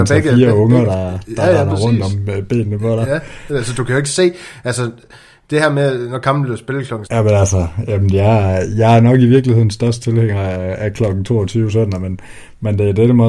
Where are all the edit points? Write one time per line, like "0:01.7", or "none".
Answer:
0:07.1